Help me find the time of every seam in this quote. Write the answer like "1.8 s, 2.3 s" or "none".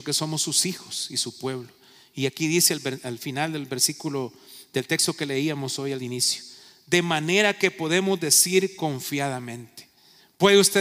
none